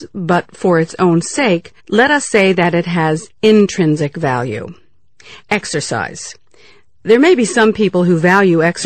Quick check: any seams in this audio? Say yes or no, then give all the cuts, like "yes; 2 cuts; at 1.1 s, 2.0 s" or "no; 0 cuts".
yes; 1 cut; at 1.8 s